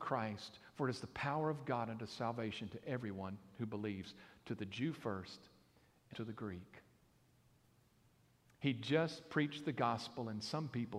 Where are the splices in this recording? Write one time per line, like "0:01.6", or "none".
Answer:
0:06.1